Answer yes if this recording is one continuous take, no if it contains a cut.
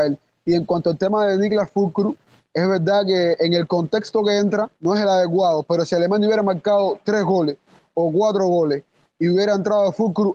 yes